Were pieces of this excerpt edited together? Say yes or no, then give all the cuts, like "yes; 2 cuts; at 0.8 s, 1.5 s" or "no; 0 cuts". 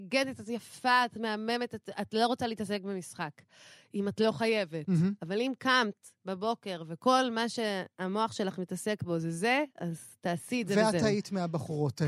no; 0 cuts